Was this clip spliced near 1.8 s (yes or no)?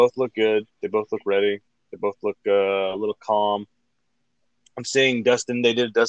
no